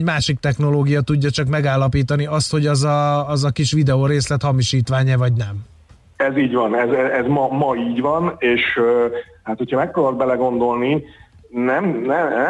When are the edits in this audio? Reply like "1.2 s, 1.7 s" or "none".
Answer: none